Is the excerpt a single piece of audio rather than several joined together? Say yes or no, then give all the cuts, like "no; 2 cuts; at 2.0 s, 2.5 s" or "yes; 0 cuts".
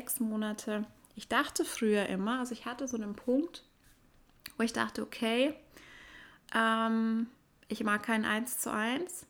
yes; 0 cuts